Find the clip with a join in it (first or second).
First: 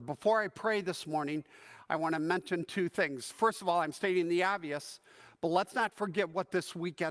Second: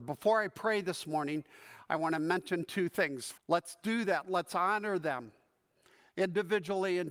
second